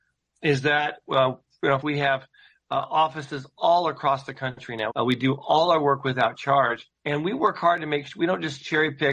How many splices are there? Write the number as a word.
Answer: three